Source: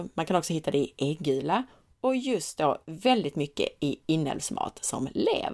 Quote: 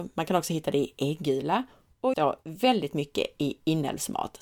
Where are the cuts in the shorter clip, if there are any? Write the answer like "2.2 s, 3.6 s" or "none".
2.1 s